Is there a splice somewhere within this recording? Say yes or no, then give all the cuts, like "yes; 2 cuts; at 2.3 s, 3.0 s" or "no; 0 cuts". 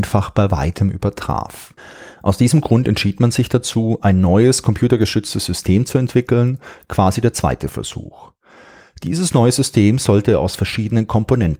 no; 0 cuts